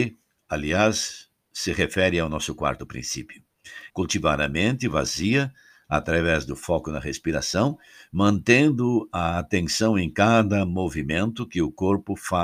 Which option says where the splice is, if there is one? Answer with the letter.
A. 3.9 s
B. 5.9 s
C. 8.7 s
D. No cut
A